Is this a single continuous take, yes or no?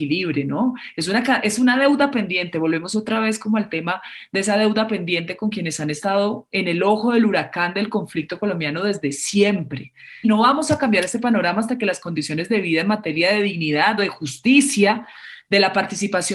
no